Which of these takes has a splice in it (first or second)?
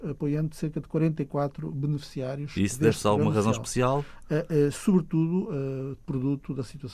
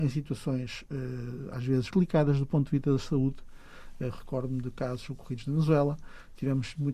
second